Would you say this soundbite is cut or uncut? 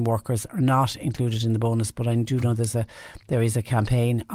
uncut